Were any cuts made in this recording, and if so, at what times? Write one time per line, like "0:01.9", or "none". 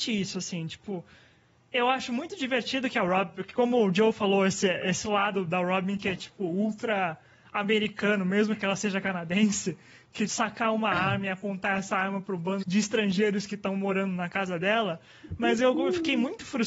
0:10.3
0:12.6